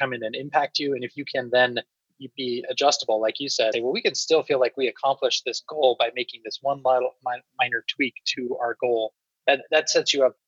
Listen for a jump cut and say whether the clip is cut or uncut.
cut